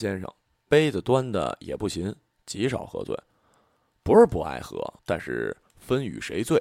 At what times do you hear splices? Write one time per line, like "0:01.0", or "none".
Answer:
0:05.0

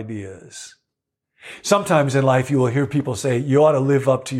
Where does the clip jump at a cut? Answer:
none

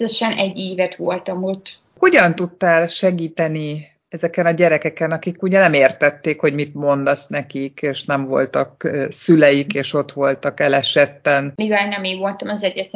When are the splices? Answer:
none

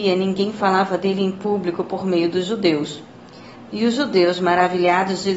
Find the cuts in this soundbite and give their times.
0:03.7

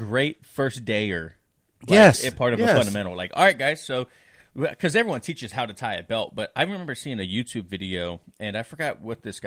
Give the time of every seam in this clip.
none

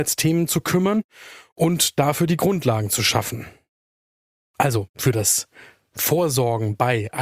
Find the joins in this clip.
none

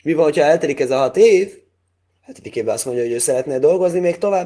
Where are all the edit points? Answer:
none

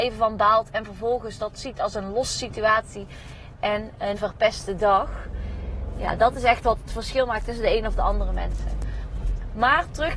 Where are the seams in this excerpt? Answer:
0:04.1

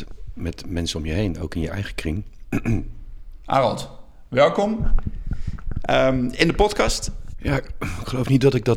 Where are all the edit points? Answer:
0:03.4
0:07.3

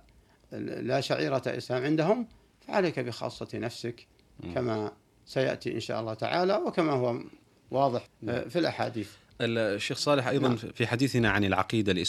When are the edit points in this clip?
0:08.1

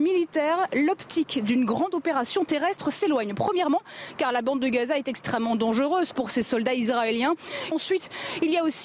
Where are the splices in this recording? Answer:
0:07.7

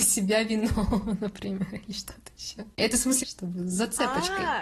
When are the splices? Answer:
0:03.2

